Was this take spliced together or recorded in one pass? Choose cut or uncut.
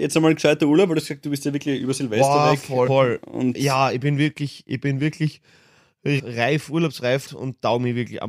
cut